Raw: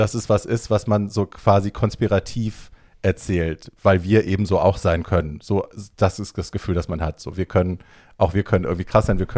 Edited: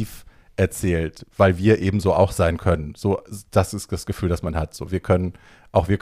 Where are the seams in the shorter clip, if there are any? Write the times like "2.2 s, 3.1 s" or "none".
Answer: none

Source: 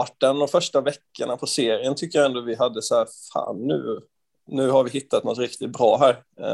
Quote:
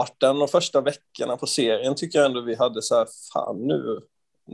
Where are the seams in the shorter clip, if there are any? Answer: none

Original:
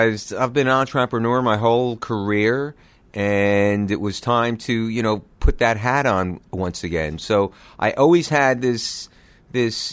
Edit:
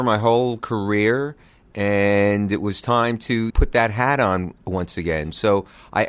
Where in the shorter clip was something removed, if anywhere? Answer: 3.5 s

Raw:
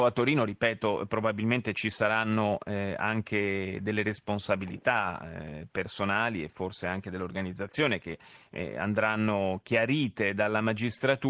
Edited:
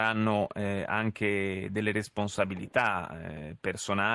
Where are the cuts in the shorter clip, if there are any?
none

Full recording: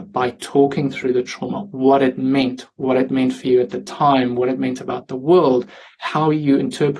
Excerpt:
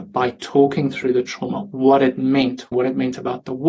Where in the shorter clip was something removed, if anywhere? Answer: 2.7 s

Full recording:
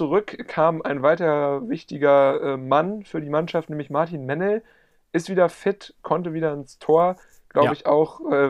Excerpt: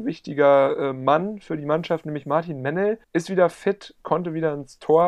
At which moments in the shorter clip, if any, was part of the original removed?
3.0 s

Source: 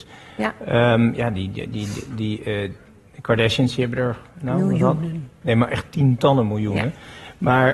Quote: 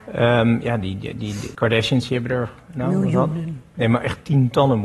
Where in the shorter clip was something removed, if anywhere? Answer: 1.5 s

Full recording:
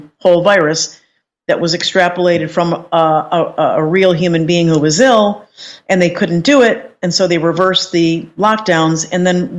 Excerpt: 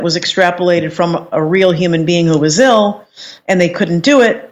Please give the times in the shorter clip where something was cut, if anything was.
1.3 s

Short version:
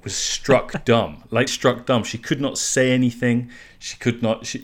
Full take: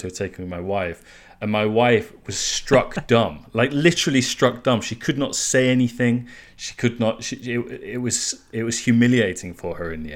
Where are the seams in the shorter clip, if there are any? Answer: 1.5 s

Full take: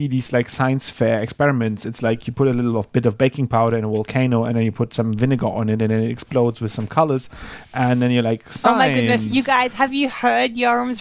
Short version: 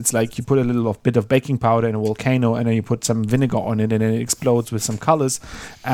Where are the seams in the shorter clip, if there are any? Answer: none

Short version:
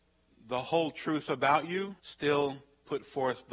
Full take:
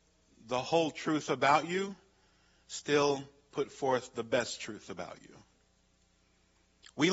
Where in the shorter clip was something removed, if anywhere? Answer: 2.0 s

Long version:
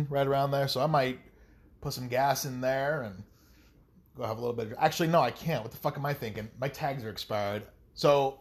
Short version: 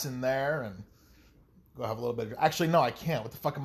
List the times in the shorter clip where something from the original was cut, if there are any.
none

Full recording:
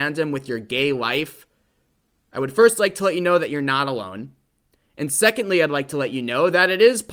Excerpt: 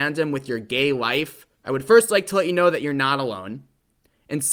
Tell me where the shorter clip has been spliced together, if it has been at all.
1.5 s

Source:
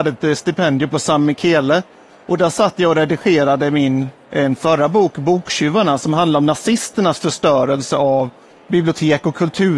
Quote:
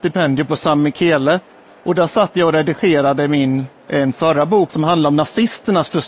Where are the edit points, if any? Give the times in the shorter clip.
4.7 s

